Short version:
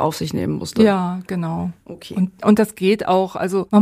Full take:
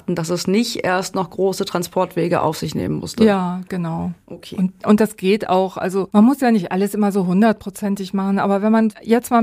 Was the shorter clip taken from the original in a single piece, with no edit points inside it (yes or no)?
yes